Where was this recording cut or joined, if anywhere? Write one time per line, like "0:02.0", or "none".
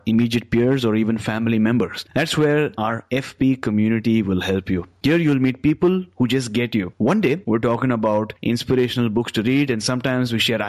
0:06.9